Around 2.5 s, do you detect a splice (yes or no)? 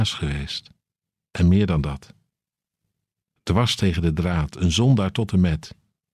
no